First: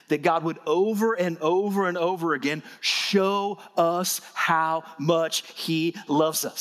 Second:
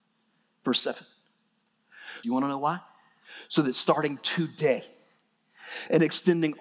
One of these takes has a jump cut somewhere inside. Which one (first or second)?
second